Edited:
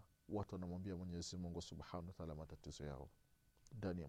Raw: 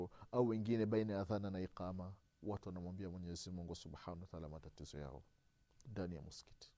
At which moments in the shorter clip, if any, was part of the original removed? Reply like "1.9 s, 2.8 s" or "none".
none